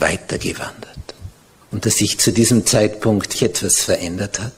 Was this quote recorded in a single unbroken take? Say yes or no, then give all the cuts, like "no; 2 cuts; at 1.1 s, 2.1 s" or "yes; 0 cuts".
no; 2 cuts; at 1.6 s, 3.3 s